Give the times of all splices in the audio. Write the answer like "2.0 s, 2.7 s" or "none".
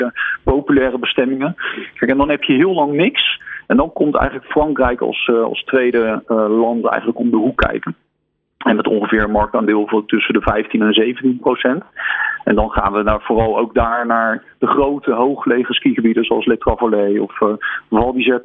none